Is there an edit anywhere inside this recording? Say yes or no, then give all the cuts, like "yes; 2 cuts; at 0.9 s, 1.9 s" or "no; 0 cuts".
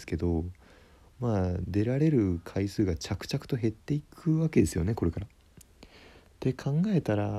no; 0 cuts